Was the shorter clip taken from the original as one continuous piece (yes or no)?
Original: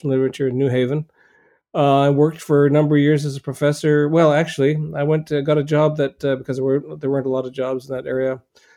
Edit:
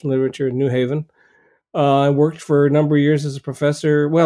yes